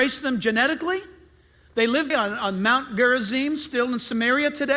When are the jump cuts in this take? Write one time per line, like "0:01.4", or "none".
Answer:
0:02.1